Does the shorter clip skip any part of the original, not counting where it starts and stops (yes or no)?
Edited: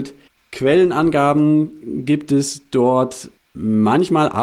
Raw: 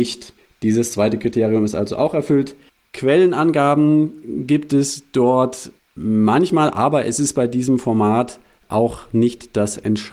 no